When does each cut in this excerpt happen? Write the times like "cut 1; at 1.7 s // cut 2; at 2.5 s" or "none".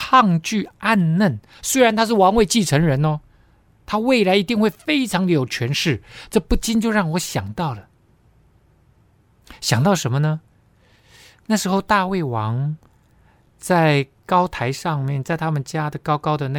none